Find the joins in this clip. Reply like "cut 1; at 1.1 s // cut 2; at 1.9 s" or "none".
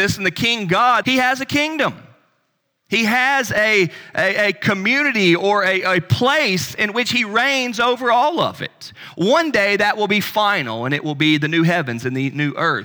cut 1; at 1.0 s